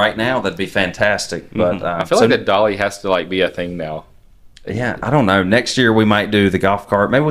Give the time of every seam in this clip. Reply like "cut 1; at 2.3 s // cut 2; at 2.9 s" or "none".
none

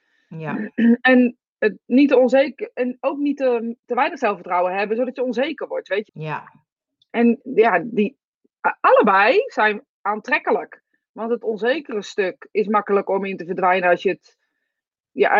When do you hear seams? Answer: cut 1; at 6.1 s

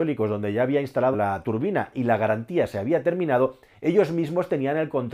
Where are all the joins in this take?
cut 1; at 1.1 s

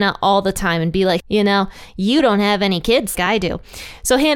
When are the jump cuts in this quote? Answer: cut 1; at 1.2 s // cut 2; at 3.1 s

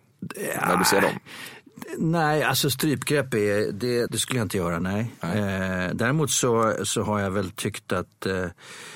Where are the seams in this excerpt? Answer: cut 1; at 4.1 s

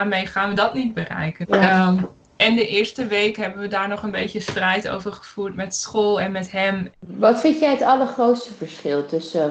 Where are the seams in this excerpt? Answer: cut 1; at 1.4 s // cut 2; at 6.9 s

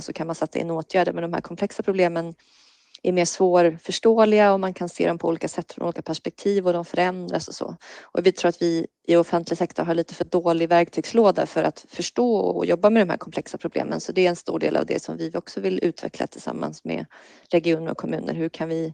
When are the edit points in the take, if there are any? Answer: none

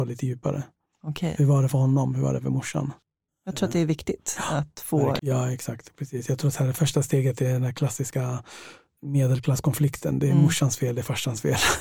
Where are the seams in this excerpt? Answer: cut 1; at 3.3 s // cut 2; at 5.2 s

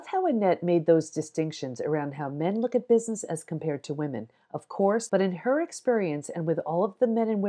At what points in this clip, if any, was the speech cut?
cut 1; at 5.1 s

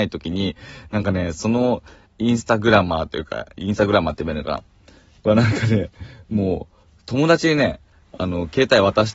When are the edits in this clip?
cut 1; at 2.0 s

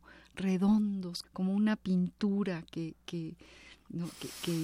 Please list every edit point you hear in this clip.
cut 1; at 1.2 s

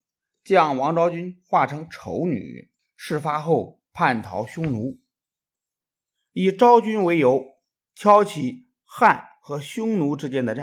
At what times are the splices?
none

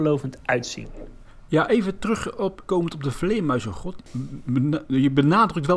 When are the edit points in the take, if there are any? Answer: cut 1; at 2.7 s

